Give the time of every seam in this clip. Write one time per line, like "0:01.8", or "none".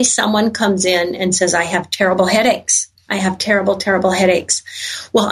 none